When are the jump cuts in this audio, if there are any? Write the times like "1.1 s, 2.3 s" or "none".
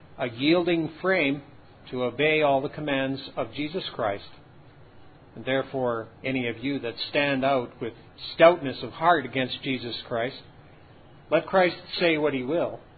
6.2 s